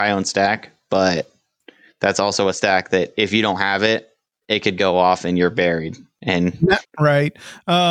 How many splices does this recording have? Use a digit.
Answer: 1